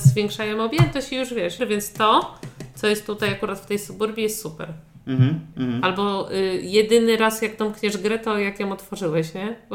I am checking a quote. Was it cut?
yes; 2 cuts; at 1.6 s, 5.5 s

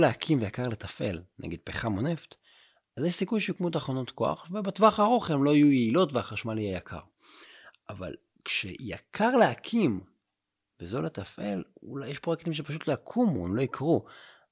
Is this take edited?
no; 0 cuts

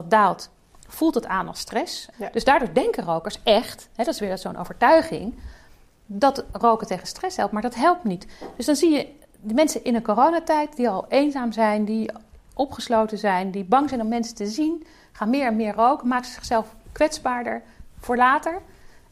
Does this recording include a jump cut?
yes; 1 cut; at 2.1 s

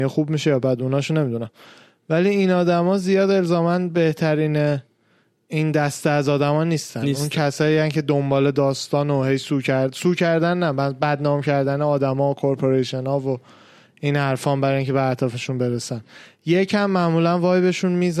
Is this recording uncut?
yes; 0 cuts

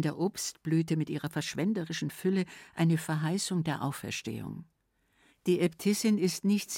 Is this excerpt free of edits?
no; 1 cut; at 5.3 s

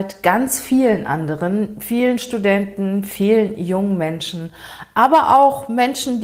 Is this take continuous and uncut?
yes; 0 cuts

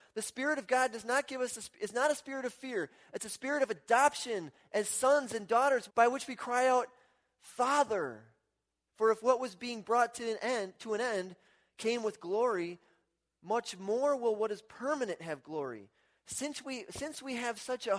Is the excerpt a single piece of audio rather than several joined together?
no; 2 cuts; at 5.9 s, 8.9 s

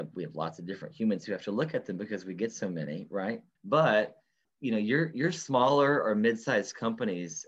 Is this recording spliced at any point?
no; 0 cuts

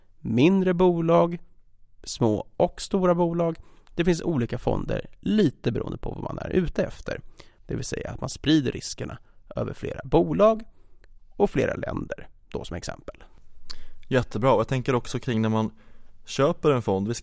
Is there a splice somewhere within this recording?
yes; 1 cut; at 7.6 s

